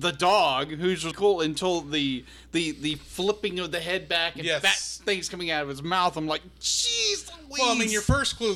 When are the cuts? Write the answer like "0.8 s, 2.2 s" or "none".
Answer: 1.1 s

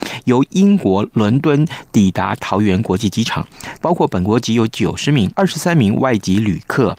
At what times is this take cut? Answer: 3.8 s, 5.3 s

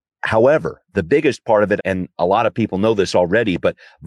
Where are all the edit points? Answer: 1.8 s

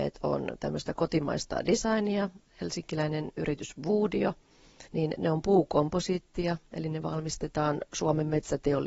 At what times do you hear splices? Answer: 4.9 s

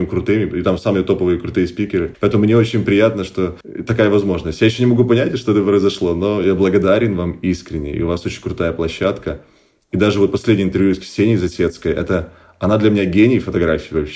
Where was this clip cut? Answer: none

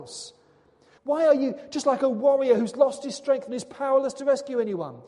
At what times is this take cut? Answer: 1.0 s

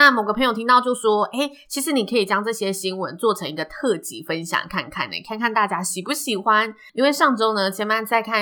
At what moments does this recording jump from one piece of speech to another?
6.9 s

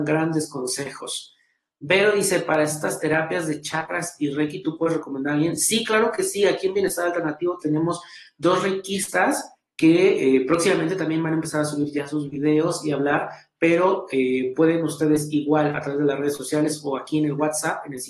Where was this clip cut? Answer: none

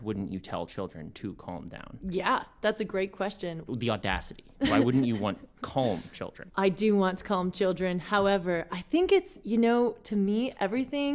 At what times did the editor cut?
3.7 s, 6.5 s

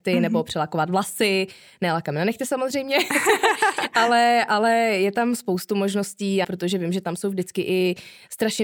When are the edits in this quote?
6.4 s

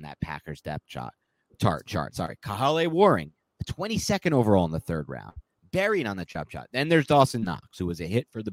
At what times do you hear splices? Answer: none

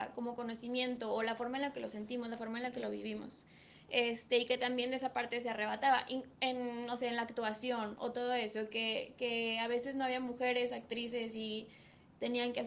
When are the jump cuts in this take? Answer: none

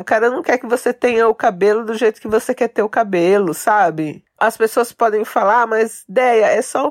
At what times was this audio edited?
none

